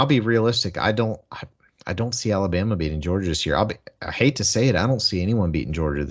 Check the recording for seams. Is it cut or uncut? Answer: uncut